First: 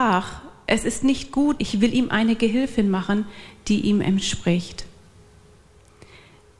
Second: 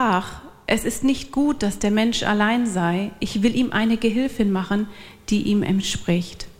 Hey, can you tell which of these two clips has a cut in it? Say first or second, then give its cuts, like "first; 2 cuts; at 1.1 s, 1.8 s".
first; 1 cut; at 1.6 s